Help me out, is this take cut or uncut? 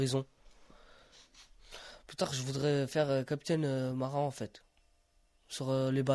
uncut